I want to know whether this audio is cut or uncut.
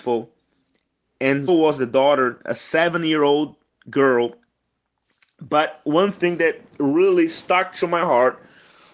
cut